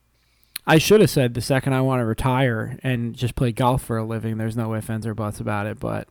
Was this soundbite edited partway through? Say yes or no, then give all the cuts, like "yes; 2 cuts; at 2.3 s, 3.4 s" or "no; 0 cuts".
no; 0 cuts